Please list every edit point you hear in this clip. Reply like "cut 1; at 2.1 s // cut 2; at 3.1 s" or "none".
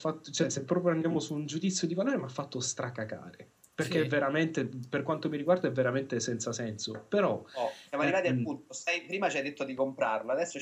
none